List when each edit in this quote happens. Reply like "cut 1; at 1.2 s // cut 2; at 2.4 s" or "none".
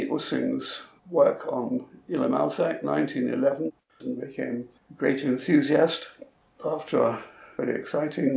cut 1; at 3.9 s